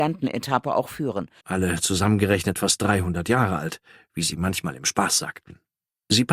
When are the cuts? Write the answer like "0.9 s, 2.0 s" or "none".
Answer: 1.4 s